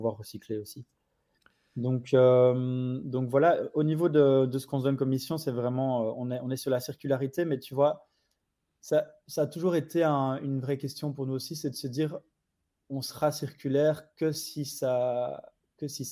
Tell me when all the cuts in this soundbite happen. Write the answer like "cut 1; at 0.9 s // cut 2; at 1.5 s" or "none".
none